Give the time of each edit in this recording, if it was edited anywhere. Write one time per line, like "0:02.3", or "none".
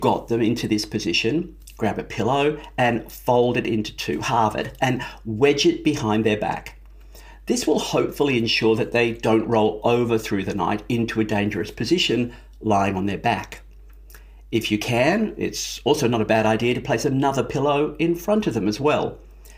none